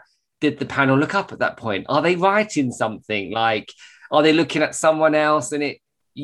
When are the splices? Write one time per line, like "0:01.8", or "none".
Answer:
none